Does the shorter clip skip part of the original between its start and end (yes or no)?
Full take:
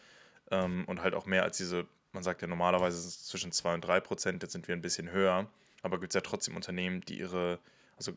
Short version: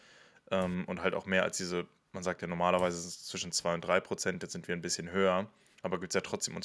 no